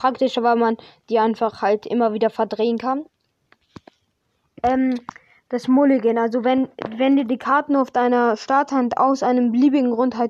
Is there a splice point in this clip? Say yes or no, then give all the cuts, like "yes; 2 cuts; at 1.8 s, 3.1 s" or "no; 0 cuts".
no; 0 cuts